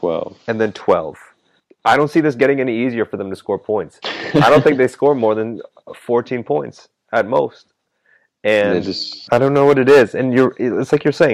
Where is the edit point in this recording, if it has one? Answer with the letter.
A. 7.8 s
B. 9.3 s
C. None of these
B